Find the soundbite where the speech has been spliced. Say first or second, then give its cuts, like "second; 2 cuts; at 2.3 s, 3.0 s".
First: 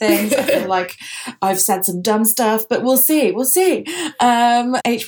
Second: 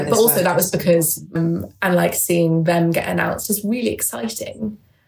second; 1 cut; at 1.4 s